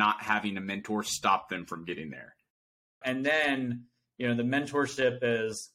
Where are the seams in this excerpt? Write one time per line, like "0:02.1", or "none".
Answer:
0:03.0